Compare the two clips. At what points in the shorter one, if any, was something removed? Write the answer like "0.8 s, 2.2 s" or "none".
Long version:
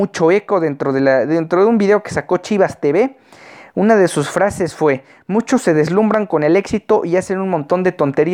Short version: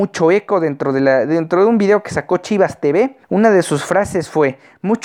3.2 s